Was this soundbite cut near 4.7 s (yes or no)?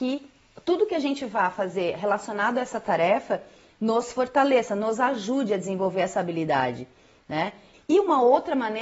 no